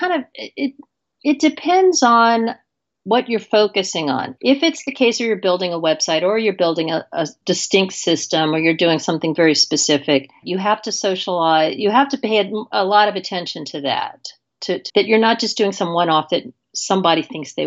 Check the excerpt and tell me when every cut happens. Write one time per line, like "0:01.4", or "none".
0:10.4
0:14.9